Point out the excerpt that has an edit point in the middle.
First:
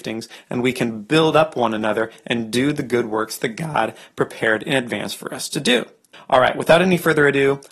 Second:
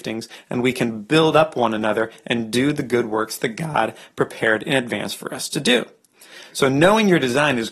first; 1 cut; at 6.1 s

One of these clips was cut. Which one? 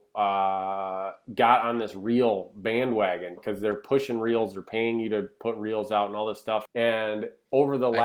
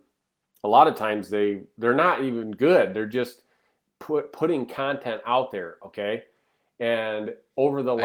first; 2 cuts; at 3.4 s, 6.6 s

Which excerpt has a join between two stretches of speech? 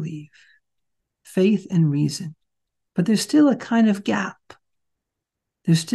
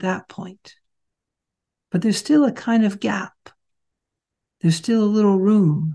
first; 2 cuts; at 1.1 s, 2.9 s

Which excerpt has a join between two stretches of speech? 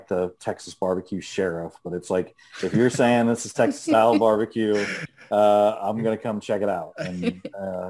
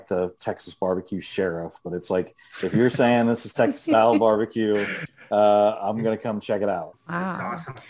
second; 1 cut; at 6.9 s

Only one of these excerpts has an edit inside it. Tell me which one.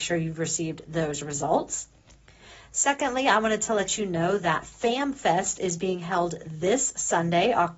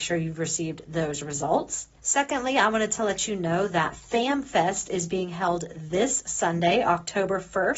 second; 1 cut; at 2.0 s

